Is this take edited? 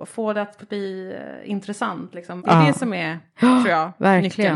yes; 1 cut; at 2.4 s

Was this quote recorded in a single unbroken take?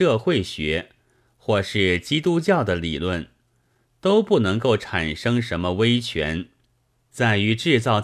no; 1 cut; at 7.1 s

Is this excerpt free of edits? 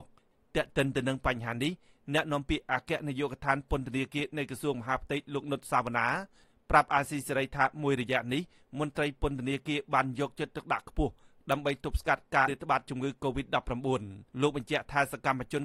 no; 2 cuts; at 12.5 s, 14.3 s

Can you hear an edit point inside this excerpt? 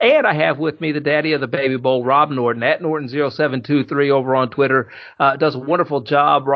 no; 0 cuts

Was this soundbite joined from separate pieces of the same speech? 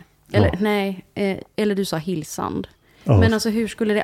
no; 0 cuts

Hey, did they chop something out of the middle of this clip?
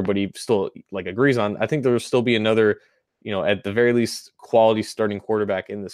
no; 0 cuts

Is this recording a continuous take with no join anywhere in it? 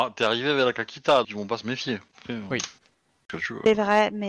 no; 1 cut; at 1.2 s

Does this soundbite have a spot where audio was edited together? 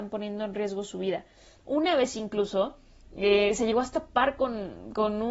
yes; 1 cut; at 1.5 s

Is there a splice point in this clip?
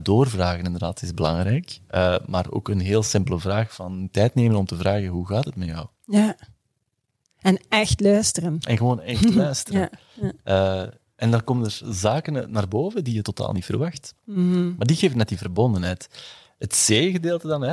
no; 0 cuts

